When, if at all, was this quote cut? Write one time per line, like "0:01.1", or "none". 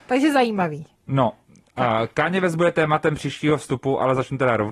none